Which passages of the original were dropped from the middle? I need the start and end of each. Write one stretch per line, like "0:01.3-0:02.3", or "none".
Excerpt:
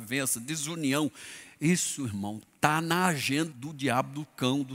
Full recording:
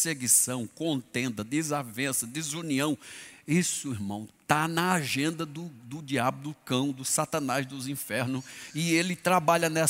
0:05.4-0:05.8